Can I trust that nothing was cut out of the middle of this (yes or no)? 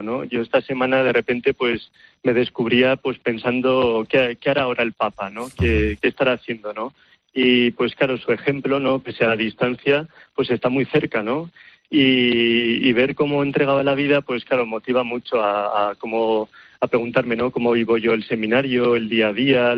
yes